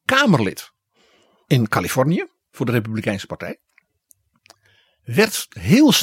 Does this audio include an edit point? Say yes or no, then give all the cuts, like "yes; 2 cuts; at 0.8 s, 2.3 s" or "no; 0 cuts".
no; 0 cuts